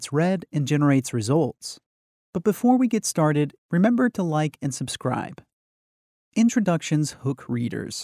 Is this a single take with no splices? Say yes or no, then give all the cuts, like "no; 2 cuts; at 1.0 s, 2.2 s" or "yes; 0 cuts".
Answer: no; 3 cuts; at 2.2 s, 3.6 s, 6.2 s